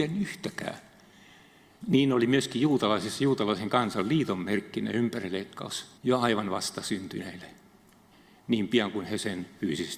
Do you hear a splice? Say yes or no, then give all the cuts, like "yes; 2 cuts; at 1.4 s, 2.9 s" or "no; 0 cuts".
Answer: yes; 2 cuts; at 1.8 s, 6.0 s